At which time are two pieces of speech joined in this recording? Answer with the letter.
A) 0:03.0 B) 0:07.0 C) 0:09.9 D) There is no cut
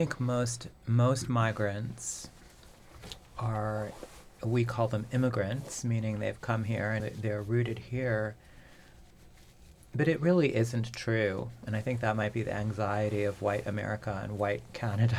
B